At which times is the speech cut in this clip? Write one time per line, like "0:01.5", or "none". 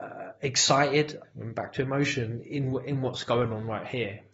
0:01.2